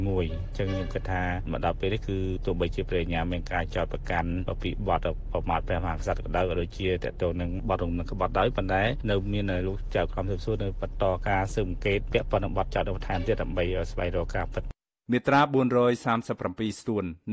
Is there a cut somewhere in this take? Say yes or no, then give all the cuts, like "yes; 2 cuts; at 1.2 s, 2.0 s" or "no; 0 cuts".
no; 0 cuts